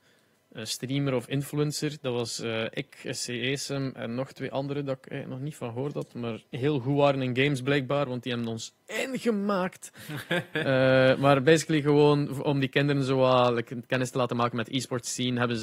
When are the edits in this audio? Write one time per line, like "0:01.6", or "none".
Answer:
0:06.5